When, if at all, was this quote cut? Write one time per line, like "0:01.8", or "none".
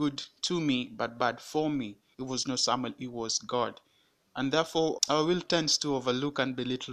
0:02.1
0:05.0